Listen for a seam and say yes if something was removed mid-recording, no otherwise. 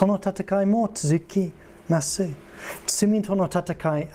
no